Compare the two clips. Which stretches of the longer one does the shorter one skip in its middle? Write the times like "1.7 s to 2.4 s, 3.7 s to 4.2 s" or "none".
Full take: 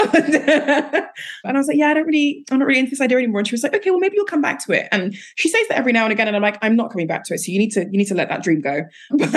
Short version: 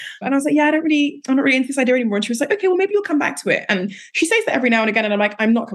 none